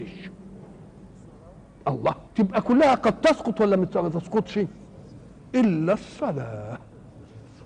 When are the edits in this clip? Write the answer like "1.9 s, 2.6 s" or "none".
2.3 s